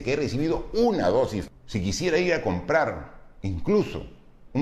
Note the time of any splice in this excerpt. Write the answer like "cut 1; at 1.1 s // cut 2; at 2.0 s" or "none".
none